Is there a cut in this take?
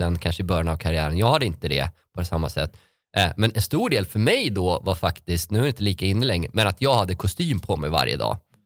no; 0 cuts

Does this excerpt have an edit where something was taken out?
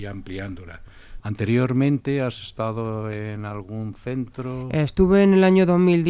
yes; 1 cut; at 1.2 s

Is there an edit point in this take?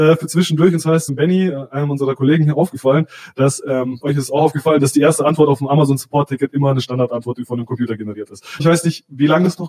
yes; 3 cuts; at 1.1 s, 4.0 s, 8.6 s

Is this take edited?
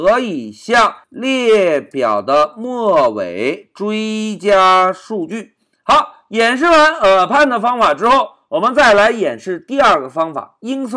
no; 0 cuts

